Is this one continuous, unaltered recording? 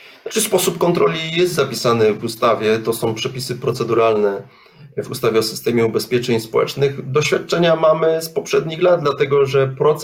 yes; 0 cuts

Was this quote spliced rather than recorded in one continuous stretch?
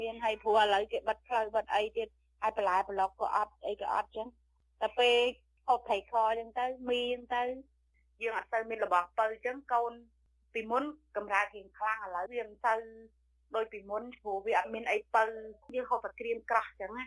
yes; 2 cuts; at 12.3 s, 15.6 s

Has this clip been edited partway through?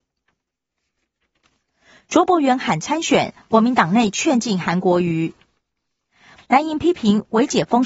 yes; 1 cut; at 6.4 s

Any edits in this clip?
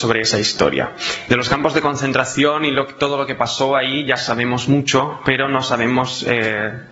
yes; 1 cut; at 1.3 s

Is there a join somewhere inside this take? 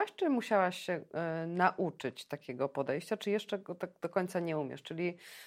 no; 0 cuts

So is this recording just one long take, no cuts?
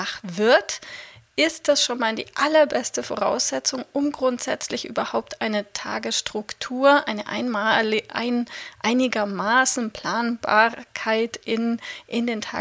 yes; 0 cuts

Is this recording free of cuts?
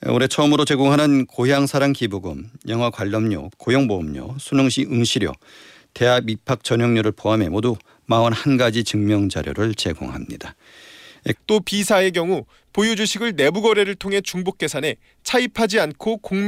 no; 2 cuts; at 3.5 s, 11.3 s

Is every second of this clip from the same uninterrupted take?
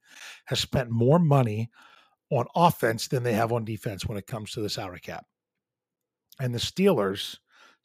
yes; 0 cuts

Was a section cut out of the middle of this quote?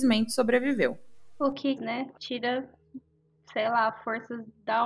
yes; 1 cut; at 1.8 s

